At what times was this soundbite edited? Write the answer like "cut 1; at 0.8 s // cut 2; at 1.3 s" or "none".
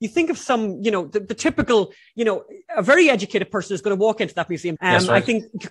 cut 1; at 4.8 s